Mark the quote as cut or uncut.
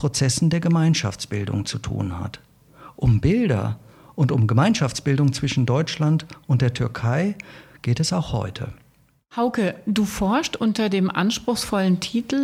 uncut